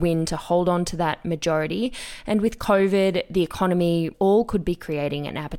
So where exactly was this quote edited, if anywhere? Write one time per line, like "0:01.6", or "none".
0:04.1